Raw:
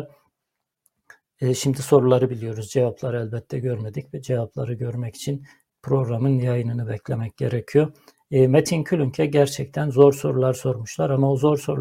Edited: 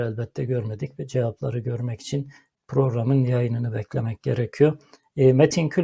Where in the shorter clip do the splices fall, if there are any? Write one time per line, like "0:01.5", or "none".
none